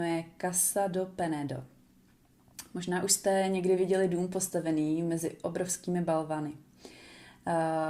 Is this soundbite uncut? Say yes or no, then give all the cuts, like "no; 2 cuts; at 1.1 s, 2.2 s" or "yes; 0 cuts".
yes; 0 cuts